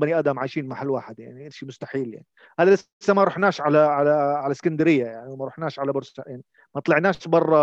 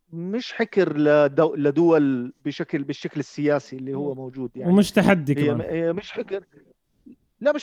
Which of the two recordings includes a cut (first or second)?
second